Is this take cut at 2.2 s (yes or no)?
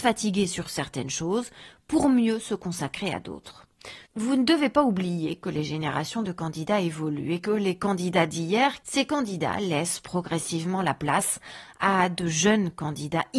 no